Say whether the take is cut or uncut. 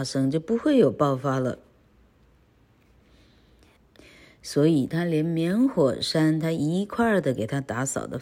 cut